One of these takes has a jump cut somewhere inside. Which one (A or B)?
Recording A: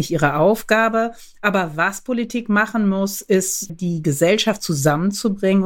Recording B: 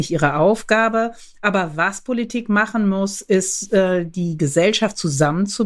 A